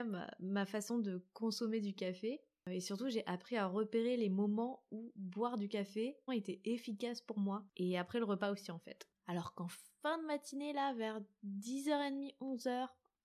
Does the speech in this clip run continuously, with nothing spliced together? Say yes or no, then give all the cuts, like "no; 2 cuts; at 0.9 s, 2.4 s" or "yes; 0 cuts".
no; 2 cuts; at 6.3 s, 7.7 s